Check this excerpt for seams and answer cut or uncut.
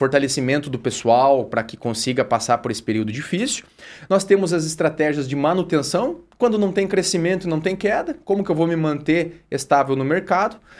uncut